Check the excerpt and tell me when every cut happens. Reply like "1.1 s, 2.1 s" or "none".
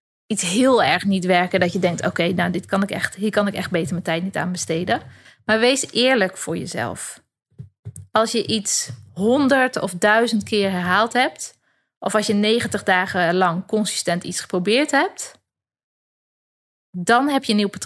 none